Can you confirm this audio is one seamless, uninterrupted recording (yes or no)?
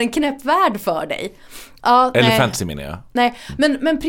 no